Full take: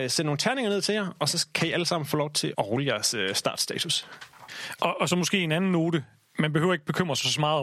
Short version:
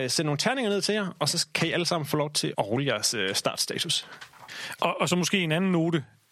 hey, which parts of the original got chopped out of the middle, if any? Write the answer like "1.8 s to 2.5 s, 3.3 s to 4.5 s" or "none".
none